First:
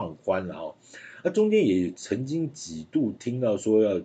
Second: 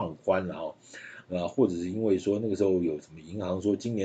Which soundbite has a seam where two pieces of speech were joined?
second; 1 cut; at 1.2 s

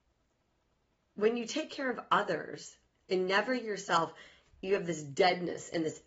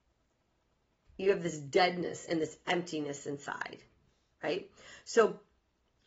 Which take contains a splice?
second; 1 cut; at 1.0 s

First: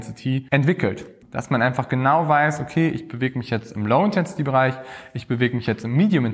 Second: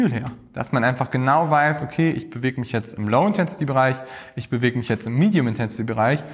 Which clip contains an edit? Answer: first; 1 cut; at 1.2 s

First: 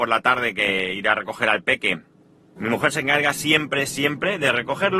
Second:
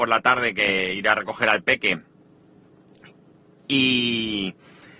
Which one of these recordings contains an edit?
first; 1 cut; at 2.6 s

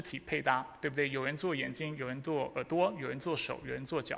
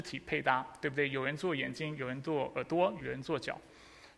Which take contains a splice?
second; 1 cut; at 3.0 s

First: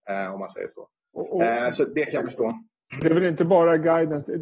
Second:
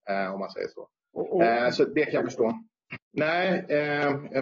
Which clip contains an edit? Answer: second; 1 cut; at 2.9 s

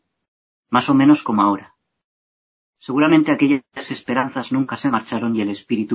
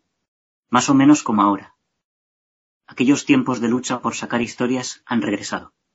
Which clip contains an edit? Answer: first; 1 cut; at 2.6 s

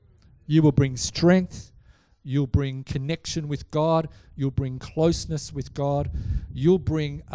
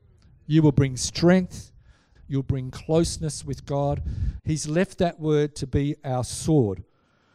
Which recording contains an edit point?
second; 2 cuts; at 2.2 s, 4.4 s

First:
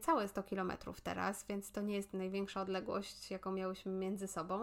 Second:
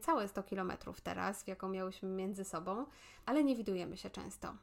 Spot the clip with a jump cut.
second; 1 cut; at 1.5 s

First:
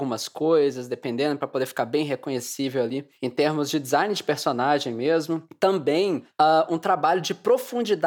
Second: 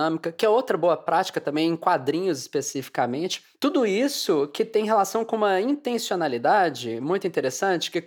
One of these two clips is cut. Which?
first; 1 cut; at 6.7 s

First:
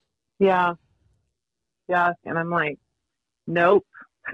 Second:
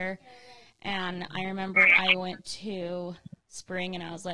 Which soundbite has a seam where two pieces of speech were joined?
first; 1 cut; at 2.2 s

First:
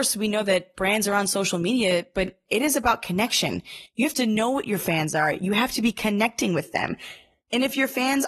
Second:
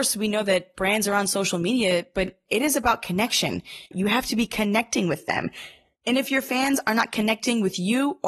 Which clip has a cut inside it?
second; 1 cut; at 3.9 s

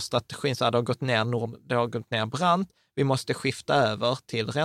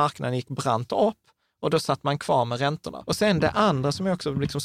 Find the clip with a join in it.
second; 1 cut; at 3.0 s

